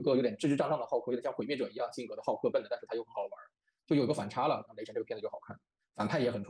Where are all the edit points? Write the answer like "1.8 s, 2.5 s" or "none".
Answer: 2.5 s, 4.7 s